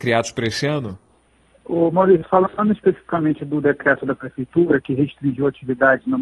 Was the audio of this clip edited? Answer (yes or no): no